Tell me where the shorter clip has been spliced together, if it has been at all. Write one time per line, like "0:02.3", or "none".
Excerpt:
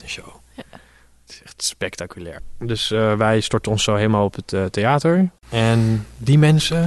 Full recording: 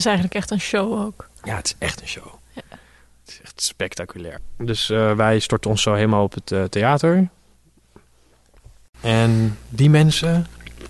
0:05.4